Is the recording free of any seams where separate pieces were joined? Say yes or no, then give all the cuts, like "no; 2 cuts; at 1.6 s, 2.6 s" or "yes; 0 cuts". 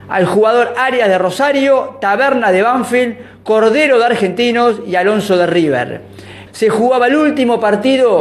no; 1 cut; at 6.5 s